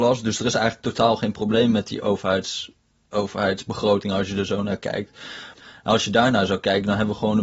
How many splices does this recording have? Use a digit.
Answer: 1